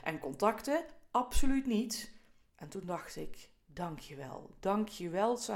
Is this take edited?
yes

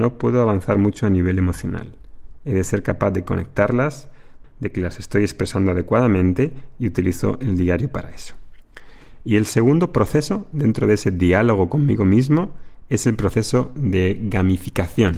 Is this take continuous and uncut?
no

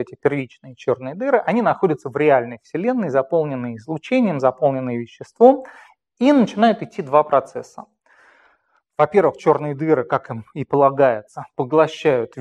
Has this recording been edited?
no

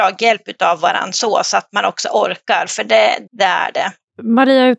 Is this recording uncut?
no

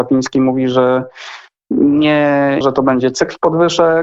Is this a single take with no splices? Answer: no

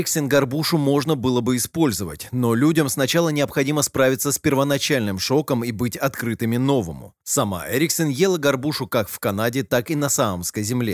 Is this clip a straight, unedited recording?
yes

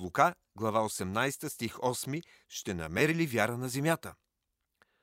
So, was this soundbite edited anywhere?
yes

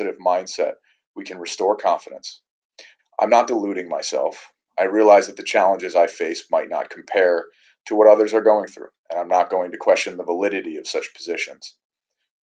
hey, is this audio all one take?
no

